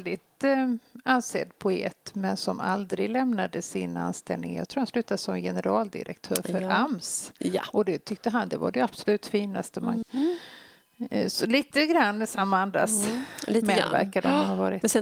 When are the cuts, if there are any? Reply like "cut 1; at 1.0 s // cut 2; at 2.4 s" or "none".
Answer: cut 1; at 10.0 s